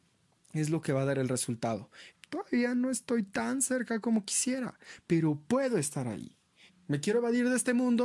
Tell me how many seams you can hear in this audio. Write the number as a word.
two